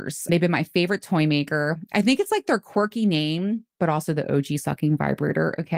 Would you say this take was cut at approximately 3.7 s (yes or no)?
no